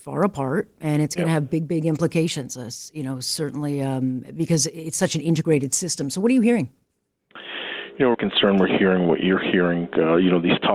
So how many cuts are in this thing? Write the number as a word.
one